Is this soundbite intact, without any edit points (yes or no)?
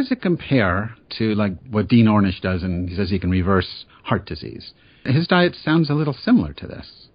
no